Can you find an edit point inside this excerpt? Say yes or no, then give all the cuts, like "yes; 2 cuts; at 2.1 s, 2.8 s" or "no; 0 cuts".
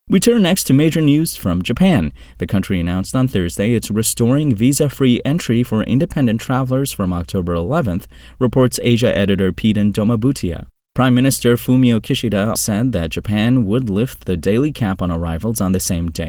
yes; 1 cut; at 12.6 s